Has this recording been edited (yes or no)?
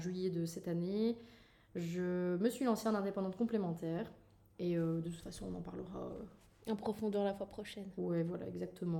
no